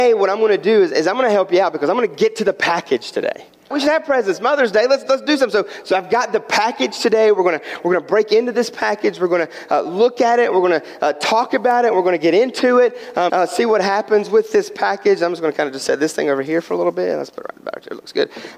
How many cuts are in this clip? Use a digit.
2